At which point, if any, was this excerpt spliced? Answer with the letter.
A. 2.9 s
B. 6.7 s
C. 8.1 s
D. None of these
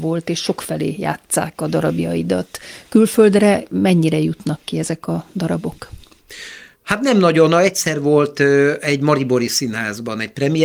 B